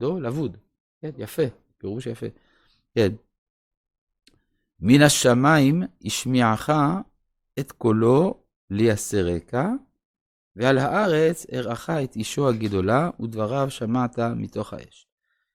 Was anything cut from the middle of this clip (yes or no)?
no